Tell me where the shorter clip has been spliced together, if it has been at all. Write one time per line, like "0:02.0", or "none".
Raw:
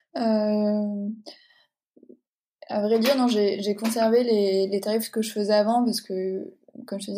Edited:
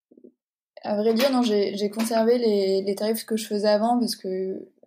none